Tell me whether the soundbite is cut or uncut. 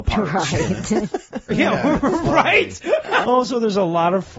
cut